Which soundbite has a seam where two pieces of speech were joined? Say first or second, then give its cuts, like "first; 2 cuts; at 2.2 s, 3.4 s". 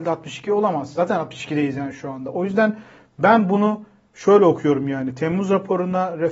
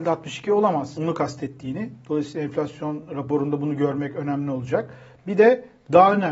second; 1 cut; at 1.0 s